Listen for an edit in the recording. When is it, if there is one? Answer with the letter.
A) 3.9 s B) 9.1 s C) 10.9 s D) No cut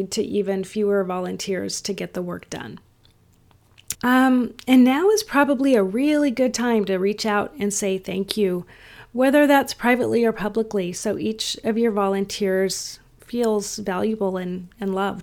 A